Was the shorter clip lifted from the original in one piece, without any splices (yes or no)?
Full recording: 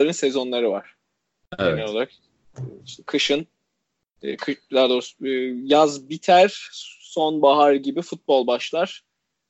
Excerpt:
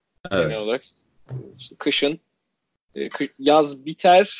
no